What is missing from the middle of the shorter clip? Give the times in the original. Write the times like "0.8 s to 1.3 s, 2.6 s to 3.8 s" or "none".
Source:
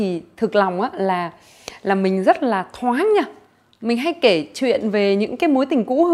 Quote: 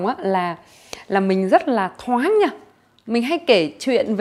none